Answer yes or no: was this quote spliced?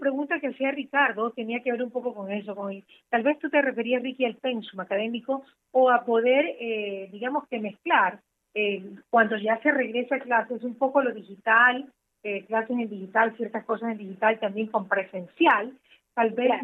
no